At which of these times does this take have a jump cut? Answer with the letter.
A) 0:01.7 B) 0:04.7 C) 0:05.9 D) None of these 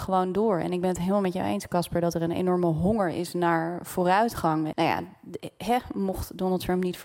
B